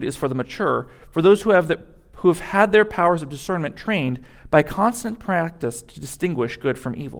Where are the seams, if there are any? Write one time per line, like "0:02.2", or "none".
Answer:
none